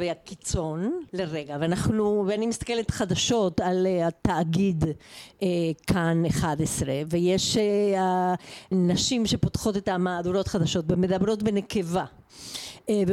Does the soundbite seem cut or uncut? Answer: cut